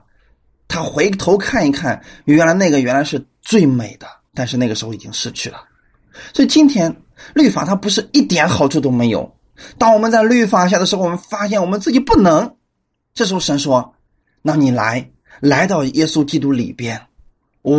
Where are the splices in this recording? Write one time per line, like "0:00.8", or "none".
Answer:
0:04.3